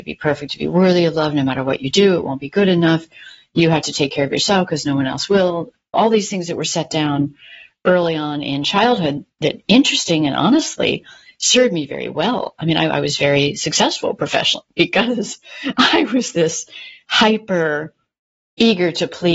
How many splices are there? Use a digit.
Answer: 1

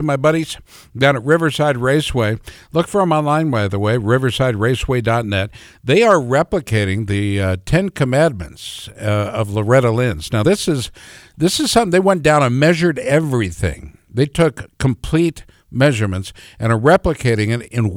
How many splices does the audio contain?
0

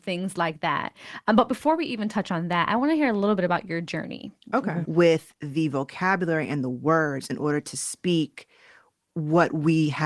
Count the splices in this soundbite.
1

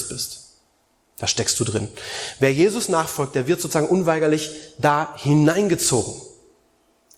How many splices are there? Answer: 0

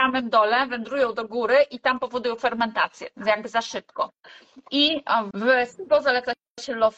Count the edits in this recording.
1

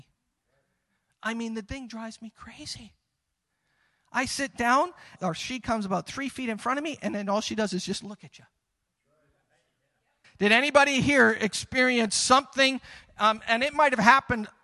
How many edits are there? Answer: 2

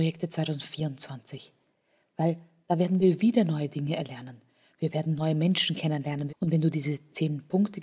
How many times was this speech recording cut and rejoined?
1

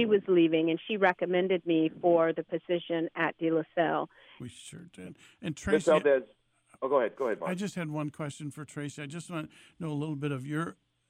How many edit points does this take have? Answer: 1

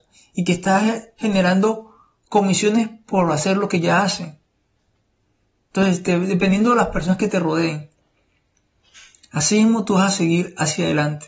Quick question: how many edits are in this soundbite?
0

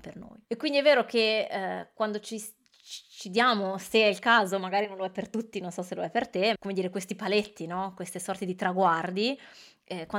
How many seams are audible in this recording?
1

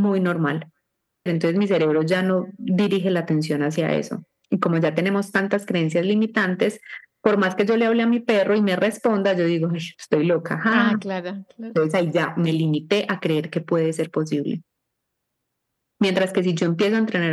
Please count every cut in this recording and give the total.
1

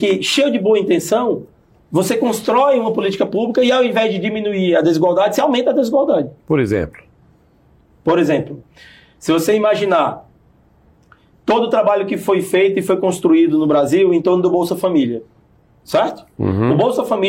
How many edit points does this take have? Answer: 1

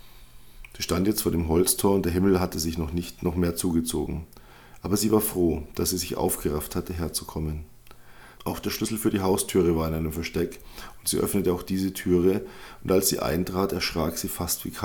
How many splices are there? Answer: 1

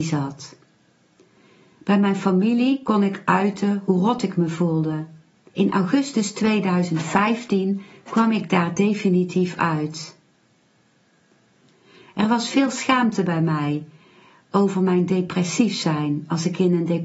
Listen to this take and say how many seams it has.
1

